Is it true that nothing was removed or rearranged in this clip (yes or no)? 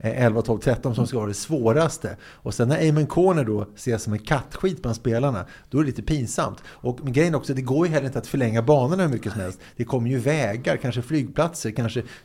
yes